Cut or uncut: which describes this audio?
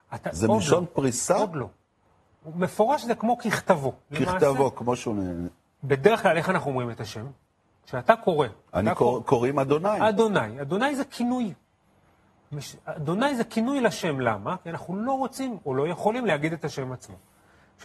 uncut